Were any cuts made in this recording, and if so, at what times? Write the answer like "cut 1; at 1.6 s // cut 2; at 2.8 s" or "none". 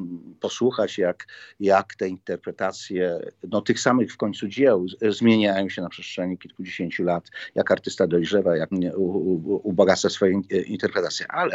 cut 1; at 8.7 s